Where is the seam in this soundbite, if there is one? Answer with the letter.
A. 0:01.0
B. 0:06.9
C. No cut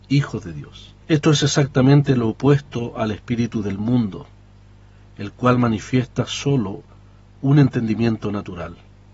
A